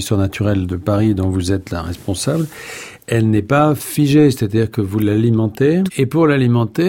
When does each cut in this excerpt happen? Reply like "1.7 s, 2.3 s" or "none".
5.9 s